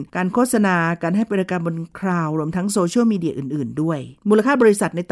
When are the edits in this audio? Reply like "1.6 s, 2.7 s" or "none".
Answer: 4.2 s